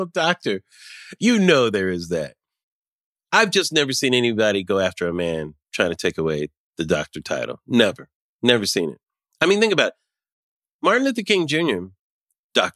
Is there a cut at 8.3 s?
no; 1 cut; at 1.2 s

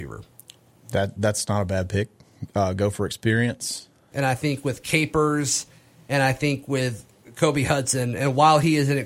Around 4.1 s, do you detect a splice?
yes; 1 cut; at 4.1 s

